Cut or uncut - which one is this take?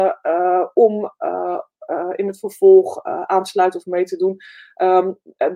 uncut